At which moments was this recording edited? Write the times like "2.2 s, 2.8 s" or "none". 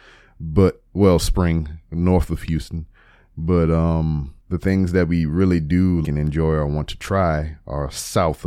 4.4 s, 6.0 s